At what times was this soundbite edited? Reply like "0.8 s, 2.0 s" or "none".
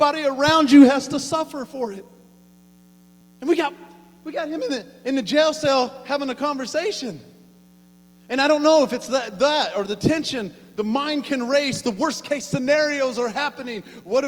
3.2 s